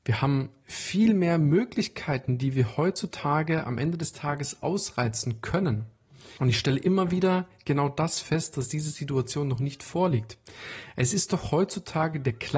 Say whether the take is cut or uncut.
cut